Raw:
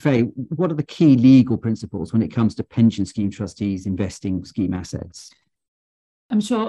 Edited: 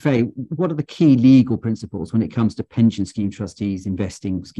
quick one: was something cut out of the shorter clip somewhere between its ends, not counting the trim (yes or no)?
no